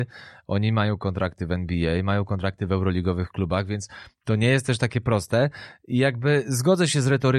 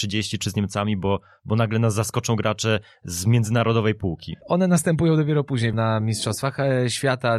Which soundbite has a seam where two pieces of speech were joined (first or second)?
second